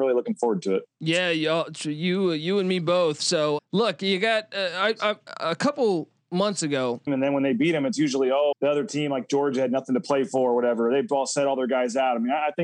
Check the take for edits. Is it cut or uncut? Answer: cut